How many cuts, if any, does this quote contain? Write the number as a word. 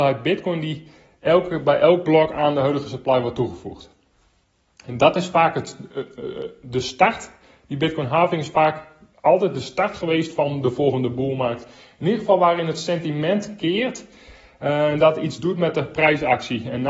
zero